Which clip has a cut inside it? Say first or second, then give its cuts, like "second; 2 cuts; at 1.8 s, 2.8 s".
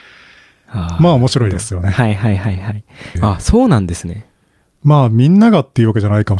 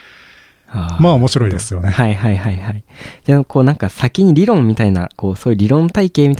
first; 1 cut; at 3.2 s